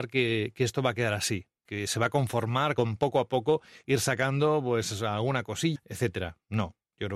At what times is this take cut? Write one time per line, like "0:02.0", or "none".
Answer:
0:05.8